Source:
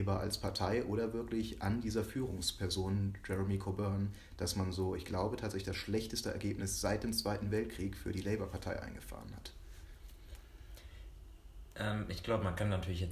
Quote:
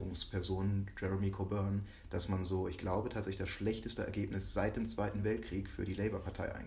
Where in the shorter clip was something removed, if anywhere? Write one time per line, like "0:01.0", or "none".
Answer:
none

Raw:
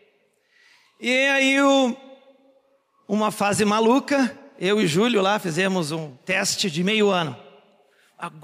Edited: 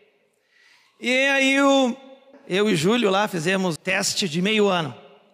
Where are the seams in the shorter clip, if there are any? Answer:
0:02.3
0:03.8

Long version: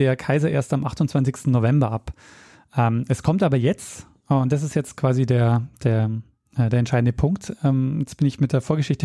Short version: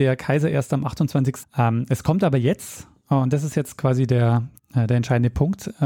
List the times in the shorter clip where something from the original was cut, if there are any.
0:01.4
0:04.6

